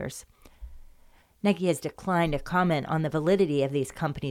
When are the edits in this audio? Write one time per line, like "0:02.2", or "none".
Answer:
0:01.2